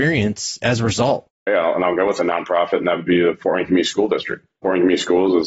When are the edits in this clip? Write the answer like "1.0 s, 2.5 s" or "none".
1.5 s